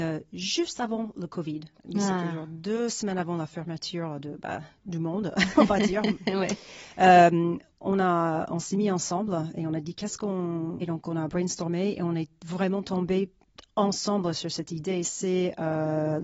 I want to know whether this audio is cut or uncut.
cut